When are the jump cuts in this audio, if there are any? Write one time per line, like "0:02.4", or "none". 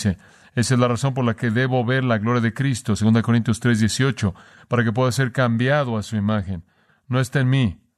0:06.9

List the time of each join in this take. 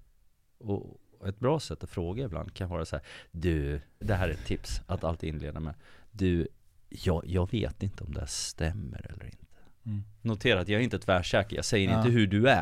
0:04.0

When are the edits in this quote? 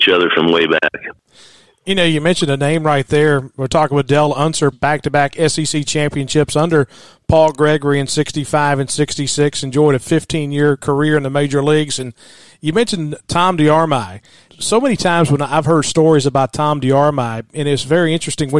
0:04.7

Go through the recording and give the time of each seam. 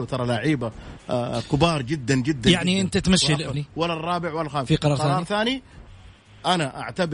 0:03.5

